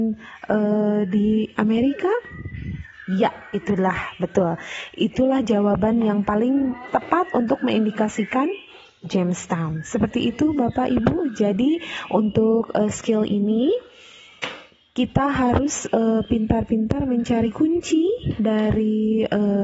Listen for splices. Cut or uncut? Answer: uncut